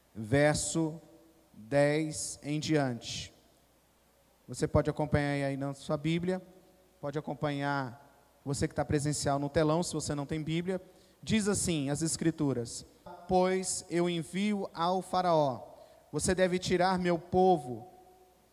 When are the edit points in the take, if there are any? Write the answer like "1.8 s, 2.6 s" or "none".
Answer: 13.1 s

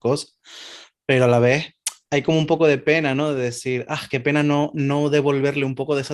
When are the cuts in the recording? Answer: none

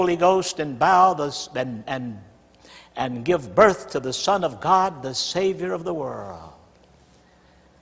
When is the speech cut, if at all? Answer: none

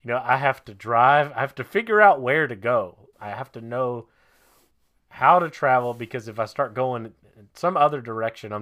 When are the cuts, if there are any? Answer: 3.1 s

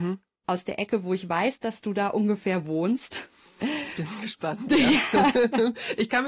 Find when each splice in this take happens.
none

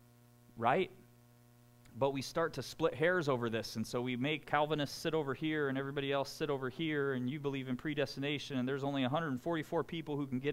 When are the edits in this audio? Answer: 4.4 s

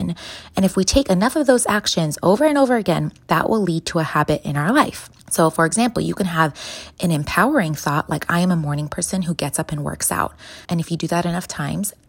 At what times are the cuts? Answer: 5.2 s, 10.6 s

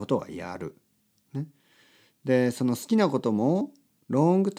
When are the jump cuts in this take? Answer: none

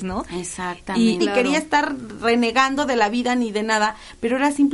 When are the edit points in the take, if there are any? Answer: 1.2 s

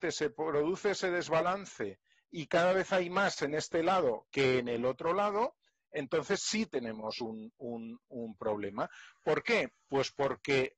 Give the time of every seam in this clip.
none

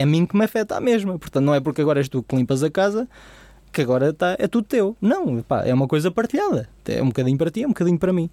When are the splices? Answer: none

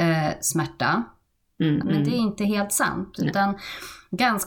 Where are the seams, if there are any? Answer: 1.8 s

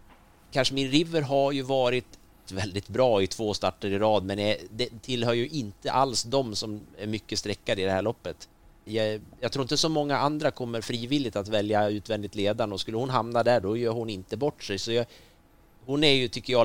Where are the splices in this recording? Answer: 2.5 s, 8.9 s

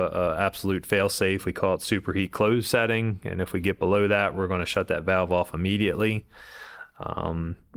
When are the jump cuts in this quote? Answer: none

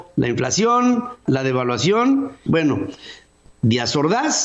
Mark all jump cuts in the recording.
1.3 s, 2.5 s

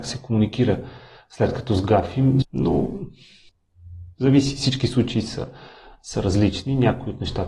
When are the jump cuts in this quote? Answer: 2.4 s

